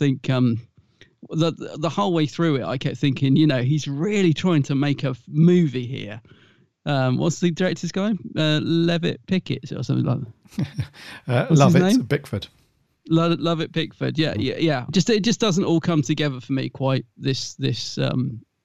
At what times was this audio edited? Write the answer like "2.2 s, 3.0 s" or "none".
14.9 s